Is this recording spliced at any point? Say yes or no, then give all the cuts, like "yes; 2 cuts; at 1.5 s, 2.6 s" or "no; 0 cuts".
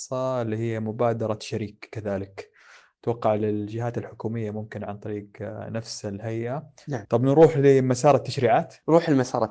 yes; 1 cut; at 7.0 s